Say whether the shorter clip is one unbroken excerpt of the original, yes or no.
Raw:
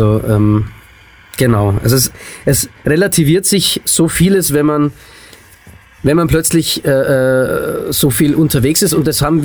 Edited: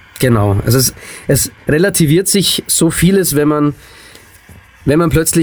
yes